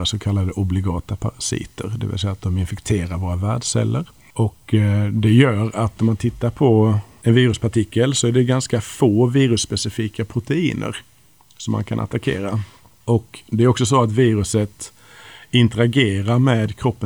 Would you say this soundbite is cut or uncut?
uncut